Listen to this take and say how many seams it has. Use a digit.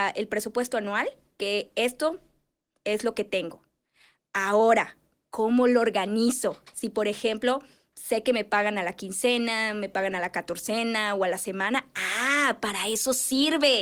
0